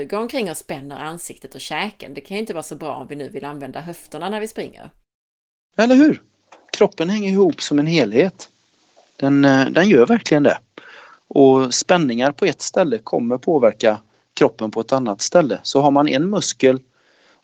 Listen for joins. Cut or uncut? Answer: uncut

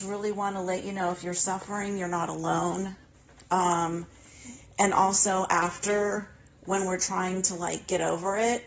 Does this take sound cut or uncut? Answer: uncut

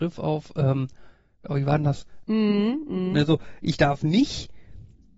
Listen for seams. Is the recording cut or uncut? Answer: cut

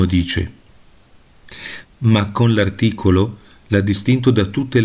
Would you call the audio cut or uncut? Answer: cut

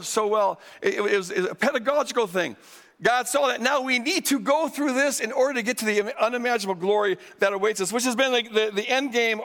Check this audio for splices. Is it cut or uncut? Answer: uncut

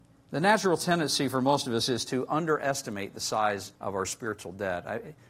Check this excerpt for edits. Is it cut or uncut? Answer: cut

